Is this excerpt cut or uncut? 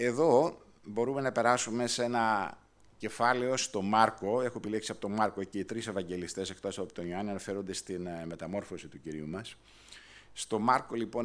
uncut